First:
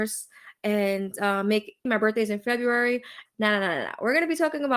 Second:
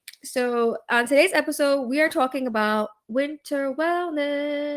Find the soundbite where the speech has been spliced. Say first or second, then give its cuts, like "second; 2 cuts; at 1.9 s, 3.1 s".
first; 2 cuts; at 1.9 s, 3.3 s